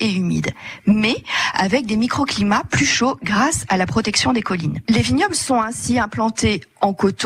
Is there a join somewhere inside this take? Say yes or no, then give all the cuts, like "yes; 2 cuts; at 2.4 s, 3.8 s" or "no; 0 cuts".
yes; 1 cut; at 4.9 s